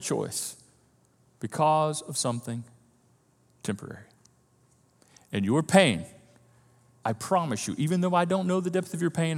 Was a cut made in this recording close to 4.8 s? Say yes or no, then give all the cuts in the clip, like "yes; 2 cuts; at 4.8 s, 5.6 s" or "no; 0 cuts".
no; 1 cut; at 7.0 s